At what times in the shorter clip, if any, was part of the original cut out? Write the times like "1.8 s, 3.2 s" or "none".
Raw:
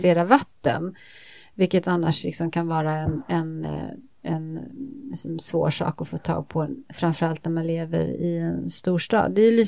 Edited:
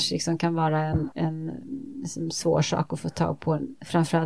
1.1 s